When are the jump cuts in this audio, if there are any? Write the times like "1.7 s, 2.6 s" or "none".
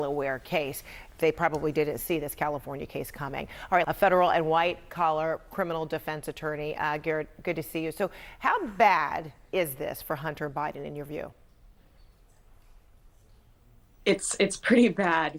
3.8 s